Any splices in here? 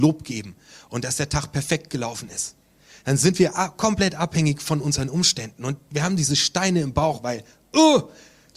no; 0 cuts

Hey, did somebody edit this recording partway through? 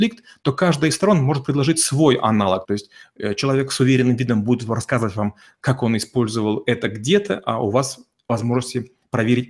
yes; 1 cut; at 2.6 s

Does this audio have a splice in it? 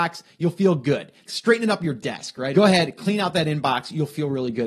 yes; 2 cuts; at 1.3 s, 2.5 s

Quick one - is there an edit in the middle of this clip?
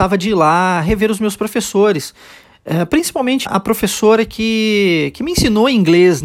yes; 1 cut; at 3.5 s

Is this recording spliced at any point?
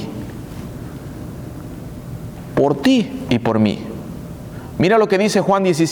no; 0 cuts

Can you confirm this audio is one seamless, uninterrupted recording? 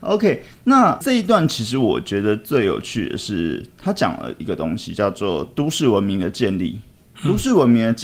yes; 0 cuts

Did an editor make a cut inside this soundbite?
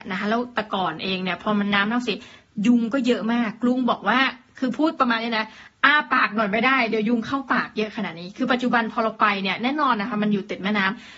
no; 0 cuts

